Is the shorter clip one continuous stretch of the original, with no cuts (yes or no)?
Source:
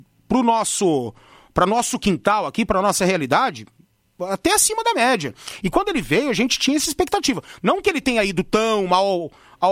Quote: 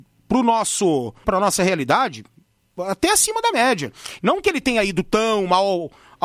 no